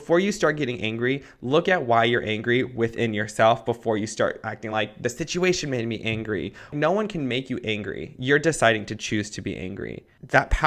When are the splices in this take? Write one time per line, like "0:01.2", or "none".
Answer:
none